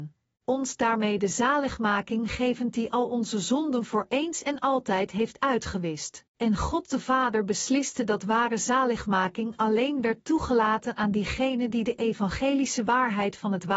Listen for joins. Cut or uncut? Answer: cut